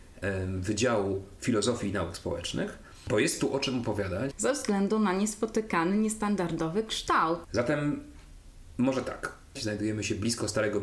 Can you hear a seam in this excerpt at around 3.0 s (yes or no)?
no